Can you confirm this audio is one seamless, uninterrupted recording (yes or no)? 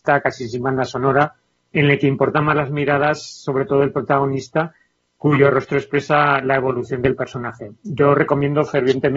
yes